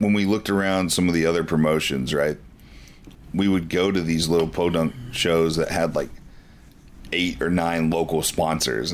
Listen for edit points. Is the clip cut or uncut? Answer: cut